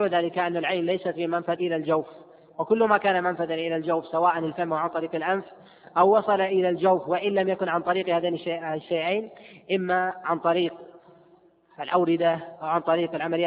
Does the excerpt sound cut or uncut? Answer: cut